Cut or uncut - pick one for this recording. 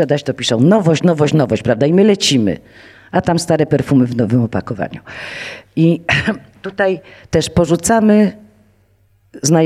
uncut